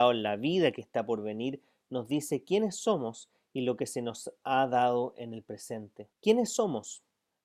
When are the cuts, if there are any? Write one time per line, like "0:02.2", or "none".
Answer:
0:06.1

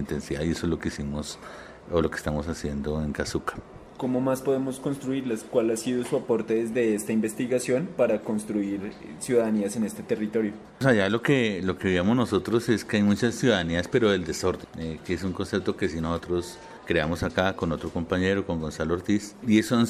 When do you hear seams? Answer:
none

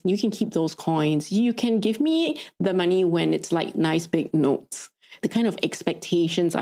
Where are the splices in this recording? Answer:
0:05.2

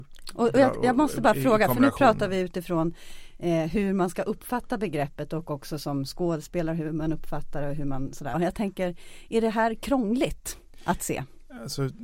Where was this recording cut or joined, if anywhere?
0:08.3

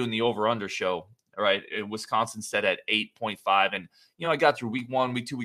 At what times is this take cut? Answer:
none

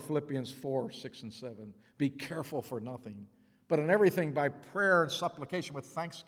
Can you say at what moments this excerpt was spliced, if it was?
none

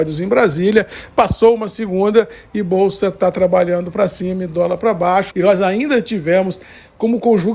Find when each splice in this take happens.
0:05.3

